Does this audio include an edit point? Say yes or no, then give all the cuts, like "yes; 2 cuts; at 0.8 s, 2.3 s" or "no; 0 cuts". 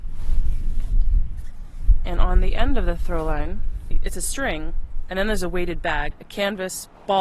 no; 0 cuts